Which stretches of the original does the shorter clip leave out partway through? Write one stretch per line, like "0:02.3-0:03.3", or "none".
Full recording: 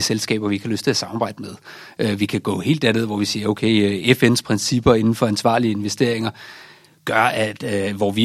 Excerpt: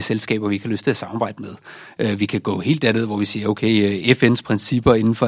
none